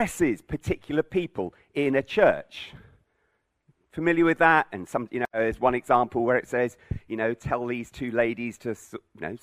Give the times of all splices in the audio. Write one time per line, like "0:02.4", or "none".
none